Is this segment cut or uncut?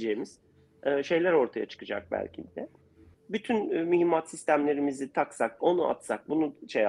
cut